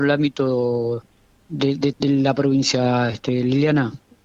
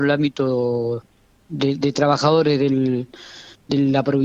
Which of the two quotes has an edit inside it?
first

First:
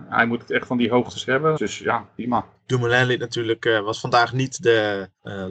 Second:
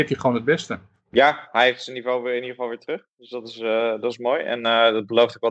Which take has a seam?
first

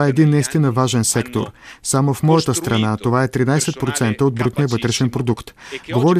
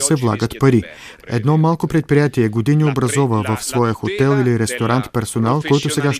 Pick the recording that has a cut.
second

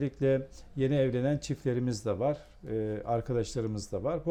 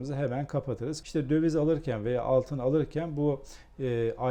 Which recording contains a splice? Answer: second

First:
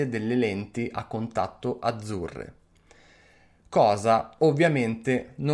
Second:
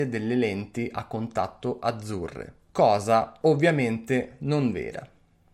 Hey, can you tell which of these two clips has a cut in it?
second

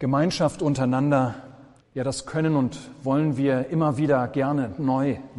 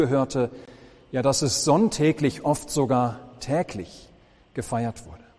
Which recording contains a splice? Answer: first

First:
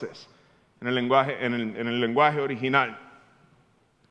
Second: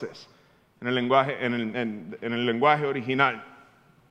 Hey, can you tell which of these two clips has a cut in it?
first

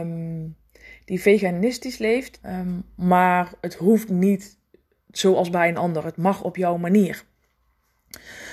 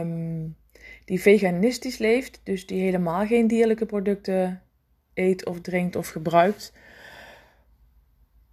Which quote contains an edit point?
first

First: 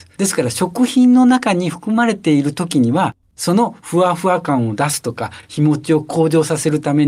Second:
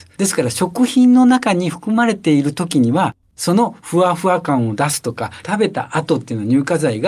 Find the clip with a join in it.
second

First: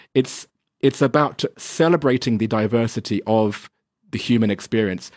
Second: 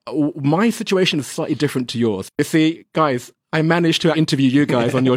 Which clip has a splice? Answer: second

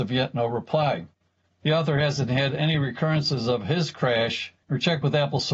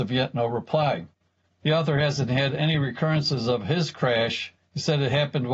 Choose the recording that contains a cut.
first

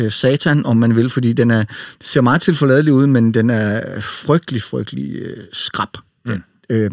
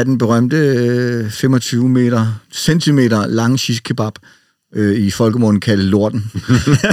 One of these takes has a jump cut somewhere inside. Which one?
first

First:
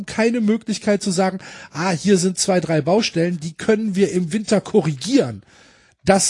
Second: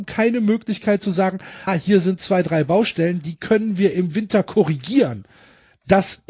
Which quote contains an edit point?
second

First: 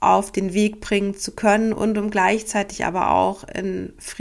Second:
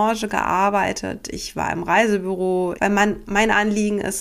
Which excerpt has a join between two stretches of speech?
second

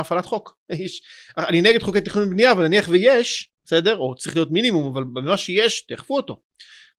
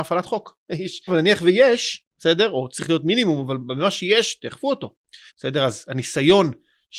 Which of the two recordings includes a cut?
second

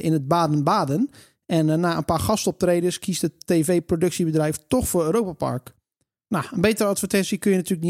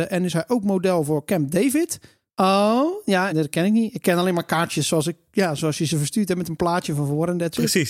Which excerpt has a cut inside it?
second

